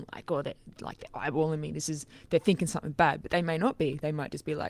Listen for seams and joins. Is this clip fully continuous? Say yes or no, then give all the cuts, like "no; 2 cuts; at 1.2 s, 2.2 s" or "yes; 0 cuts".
yes; 0 cuts